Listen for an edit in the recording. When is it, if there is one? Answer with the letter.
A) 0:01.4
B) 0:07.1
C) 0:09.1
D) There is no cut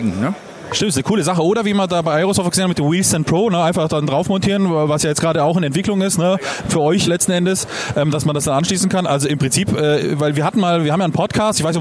B